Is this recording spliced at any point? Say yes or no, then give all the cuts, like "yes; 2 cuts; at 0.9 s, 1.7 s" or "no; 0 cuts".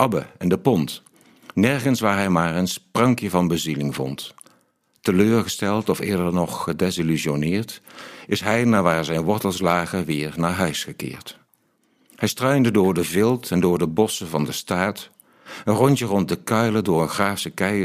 no; 0 cuts